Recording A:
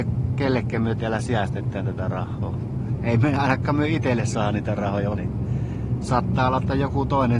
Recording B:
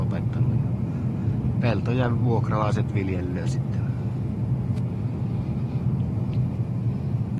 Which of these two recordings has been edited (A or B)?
A